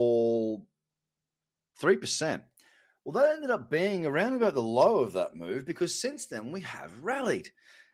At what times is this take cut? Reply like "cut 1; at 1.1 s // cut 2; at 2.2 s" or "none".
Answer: none